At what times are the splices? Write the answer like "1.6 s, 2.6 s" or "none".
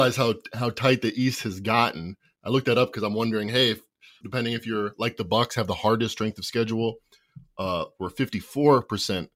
4.2 s